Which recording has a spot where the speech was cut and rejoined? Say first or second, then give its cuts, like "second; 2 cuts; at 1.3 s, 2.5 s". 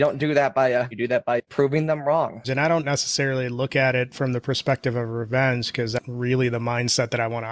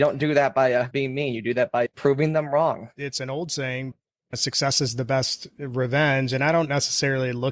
first; 2 cuts; at 0.9 s, 2.4 s